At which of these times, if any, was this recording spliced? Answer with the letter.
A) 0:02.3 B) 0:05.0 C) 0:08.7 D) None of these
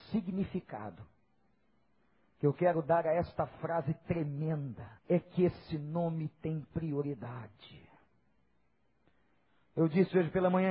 B